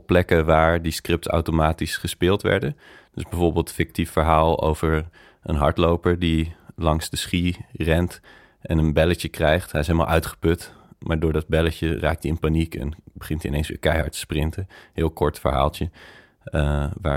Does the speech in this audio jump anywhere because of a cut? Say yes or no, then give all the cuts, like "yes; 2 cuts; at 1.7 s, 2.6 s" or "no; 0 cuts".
no; 0 cuts